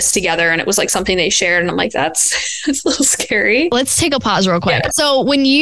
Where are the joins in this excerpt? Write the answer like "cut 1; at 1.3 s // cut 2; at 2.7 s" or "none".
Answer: none